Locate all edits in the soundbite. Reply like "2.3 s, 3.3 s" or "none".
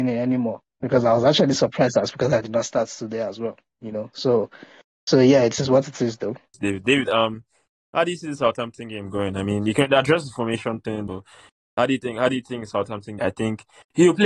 11.1 s, 13.2 s